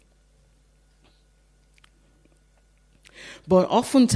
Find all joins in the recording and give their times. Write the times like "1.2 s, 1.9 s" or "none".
none